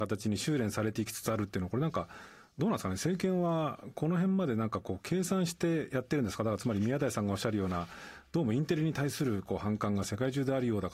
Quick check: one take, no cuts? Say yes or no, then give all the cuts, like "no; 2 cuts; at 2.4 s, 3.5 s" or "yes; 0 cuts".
yes; 0 cuts